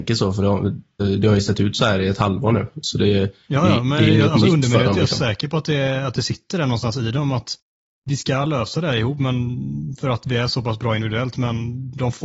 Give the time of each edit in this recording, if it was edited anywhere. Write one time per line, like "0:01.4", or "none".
0:01.0